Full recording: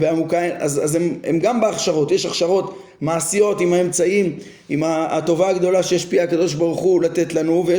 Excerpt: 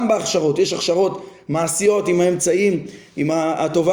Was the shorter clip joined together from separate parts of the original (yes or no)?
no